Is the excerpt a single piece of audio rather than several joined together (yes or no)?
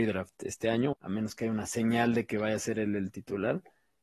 no